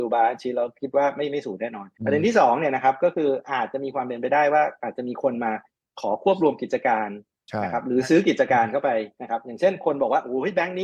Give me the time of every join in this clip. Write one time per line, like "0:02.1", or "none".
0:01.9